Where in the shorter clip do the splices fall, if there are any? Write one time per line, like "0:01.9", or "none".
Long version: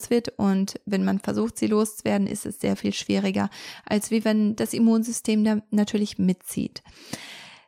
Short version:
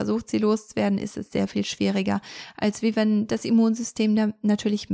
none